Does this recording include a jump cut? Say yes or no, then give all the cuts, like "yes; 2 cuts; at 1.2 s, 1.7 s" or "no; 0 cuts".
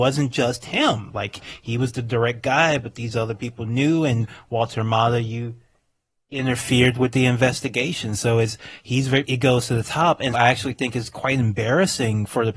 yes; 2 cuts; at 9.2 s, 10.3 s